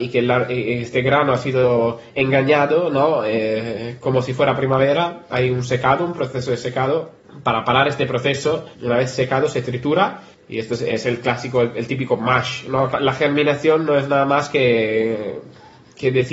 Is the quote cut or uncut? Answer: cut